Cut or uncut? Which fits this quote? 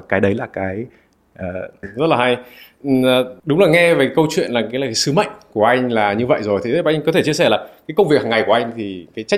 cut